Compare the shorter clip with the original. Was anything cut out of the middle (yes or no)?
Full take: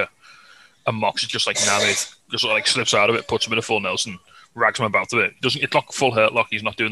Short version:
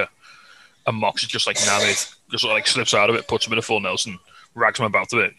no